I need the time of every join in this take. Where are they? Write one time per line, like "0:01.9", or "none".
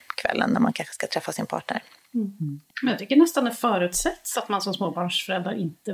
0:02.7